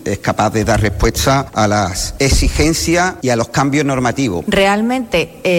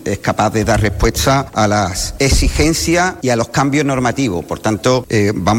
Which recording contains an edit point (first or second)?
first